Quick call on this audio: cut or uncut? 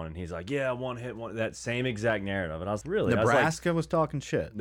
cut